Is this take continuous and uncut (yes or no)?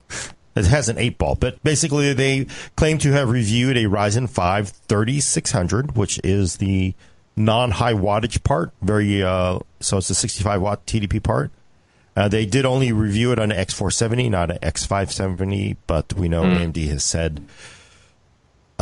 yes